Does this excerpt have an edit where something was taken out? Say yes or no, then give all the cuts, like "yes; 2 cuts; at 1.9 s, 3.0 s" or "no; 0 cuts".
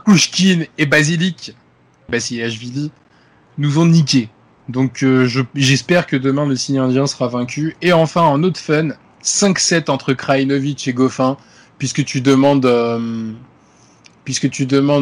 no; 0 cuts